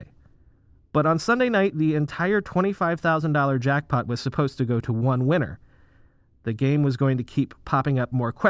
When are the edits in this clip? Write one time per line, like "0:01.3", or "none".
none